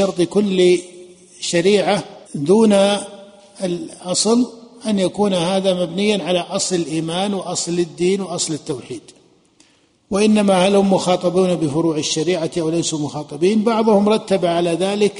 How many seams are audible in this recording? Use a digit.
1